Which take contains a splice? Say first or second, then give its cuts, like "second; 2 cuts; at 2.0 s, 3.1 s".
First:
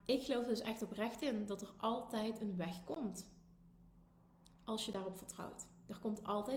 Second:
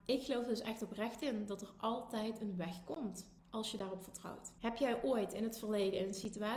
second; 2 cuts; at 3.4 s, 4.6 s